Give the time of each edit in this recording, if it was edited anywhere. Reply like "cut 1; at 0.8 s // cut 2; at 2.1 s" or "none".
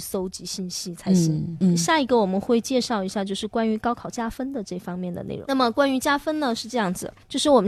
none